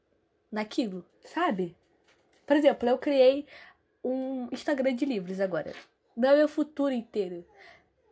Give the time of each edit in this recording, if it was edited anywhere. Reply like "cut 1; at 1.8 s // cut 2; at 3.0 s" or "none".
cut 1; at 1.1 s // cut 2; at 6.0 s